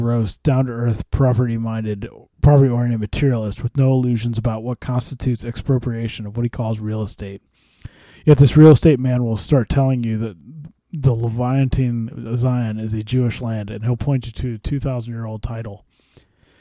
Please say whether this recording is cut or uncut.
uncut